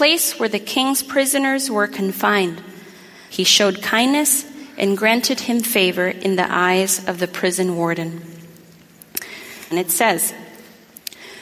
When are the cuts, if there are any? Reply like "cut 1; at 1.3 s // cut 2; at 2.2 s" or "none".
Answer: cut 1; at 3.3 s // cut 2; at 9.7 s